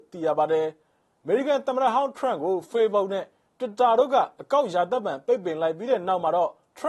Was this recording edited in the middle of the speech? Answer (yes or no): no